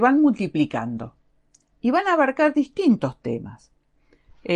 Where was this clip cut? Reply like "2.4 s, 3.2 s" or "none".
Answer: none